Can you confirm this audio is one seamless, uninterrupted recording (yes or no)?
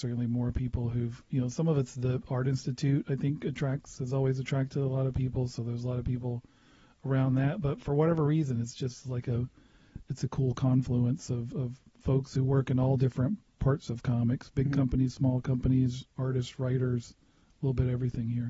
no